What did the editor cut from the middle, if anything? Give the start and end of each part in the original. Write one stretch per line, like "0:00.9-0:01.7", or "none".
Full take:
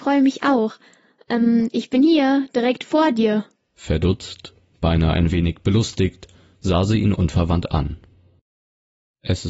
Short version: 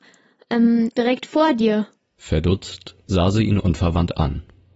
0:01.7-0:02.5
0:04.6-0:06.6